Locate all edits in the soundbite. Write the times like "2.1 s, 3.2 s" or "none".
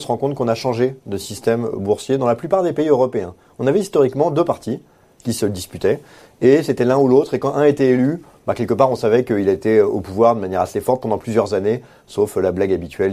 none